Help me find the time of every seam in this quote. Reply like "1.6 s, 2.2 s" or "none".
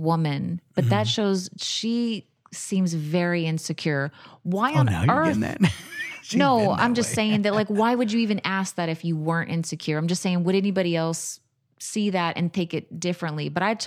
none